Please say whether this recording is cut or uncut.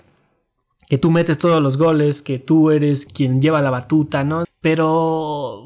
cut